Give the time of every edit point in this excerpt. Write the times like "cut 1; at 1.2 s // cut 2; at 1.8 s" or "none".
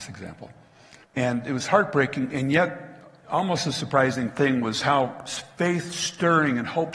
cut 1; at 1.0 s